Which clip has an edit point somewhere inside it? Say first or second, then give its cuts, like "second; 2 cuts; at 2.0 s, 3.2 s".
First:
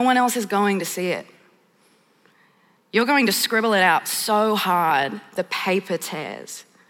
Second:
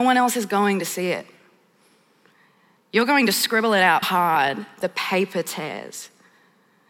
second; 1 cut; at 4.0 s